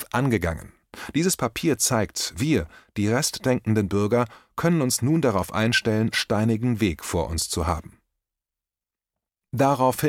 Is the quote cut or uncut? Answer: cut